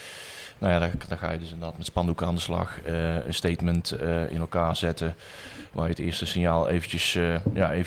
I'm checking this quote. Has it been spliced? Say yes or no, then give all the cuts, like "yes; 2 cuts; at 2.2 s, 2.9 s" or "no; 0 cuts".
no; 0 cuts